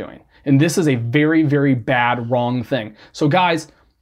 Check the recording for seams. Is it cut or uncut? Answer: uncut